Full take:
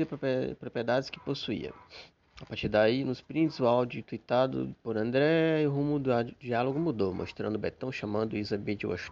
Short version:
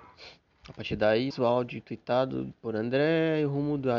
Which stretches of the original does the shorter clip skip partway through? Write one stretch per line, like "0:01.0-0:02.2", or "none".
0:03.0-0:03.5